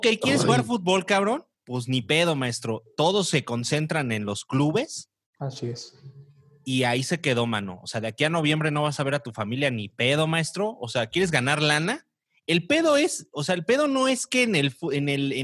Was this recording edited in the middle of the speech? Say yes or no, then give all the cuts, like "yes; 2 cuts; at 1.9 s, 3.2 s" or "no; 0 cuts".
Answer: yes; 1 cut; at 1.5 s